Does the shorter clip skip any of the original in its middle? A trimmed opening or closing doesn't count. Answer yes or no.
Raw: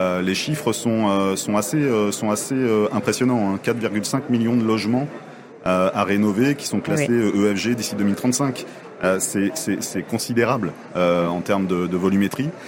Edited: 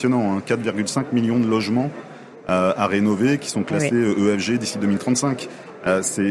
no